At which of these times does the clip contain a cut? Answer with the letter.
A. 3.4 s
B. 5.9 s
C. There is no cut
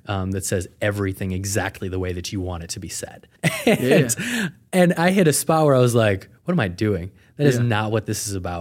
A